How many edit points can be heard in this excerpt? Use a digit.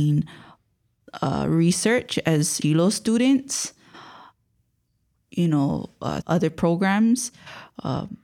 2